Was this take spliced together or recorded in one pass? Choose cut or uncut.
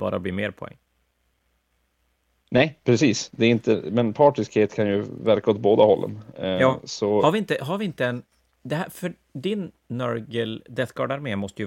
uncut